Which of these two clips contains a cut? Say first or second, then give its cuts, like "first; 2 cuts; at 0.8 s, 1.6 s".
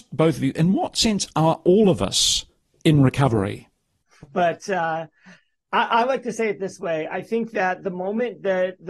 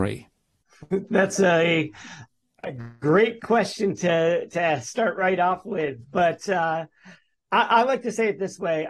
first; 1 cut; at 4.3 s